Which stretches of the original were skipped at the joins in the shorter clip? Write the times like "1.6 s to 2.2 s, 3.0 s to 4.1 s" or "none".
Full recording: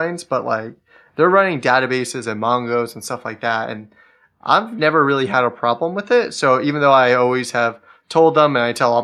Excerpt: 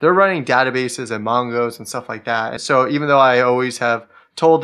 3.7 s to 6.3 s